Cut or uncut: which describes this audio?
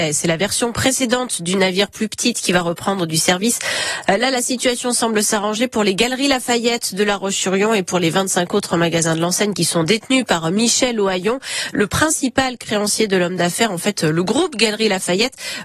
cut